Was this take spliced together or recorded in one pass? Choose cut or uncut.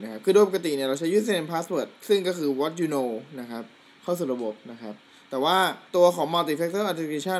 cut